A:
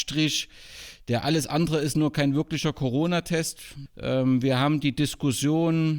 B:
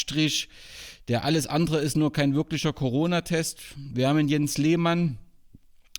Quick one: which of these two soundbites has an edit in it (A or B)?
A